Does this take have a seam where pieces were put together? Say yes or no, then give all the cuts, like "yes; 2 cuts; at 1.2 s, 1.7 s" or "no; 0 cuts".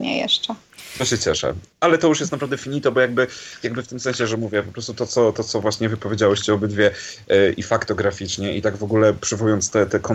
no; 0 cuts